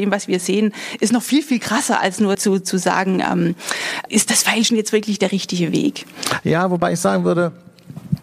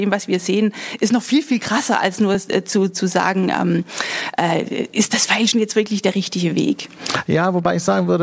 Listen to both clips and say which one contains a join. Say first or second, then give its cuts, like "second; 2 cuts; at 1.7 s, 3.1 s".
first; 2 cuts; at 2.3 s, 4.1 s